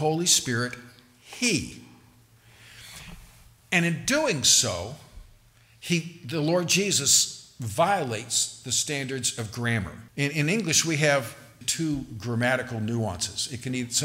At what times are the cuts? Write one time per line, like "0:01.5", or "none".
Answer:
0:10.1
0:11.6